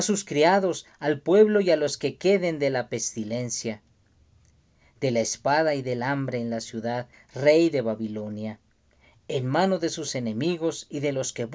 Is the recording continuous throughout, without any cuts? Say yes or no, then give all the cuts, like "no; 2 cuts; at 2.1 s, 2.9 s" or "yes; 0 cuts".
no; 1 cut; at 7.1 s